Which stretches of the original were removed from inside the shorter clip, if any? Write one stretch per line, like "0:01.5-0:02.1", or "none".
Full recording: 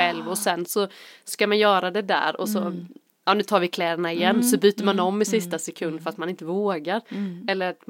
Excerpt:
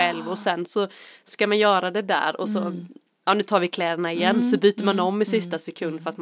none